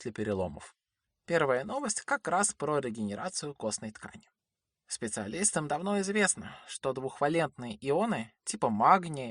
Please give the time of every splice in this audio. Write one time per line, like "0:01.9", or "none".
none